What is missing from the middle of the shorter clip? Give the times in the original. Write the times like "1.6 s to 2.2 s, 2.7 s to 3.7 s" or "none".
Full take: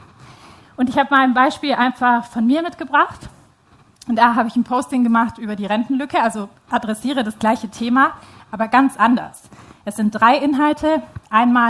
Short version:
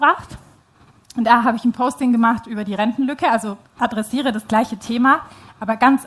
none